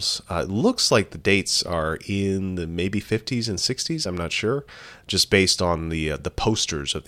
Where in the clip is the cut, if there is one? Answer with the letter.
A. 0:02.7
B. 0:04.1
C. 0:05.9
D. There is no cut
D